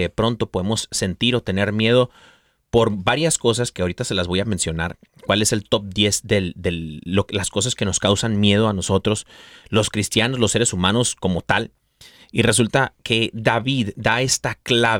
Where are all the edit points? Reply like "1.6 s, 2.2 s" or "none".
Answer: none